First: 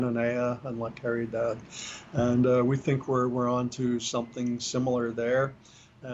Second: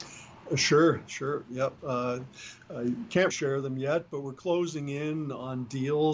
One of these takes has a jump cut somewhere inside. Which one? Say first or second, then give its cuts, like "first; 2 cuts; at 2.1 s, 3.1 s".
second; 1 cut; at 3.3 s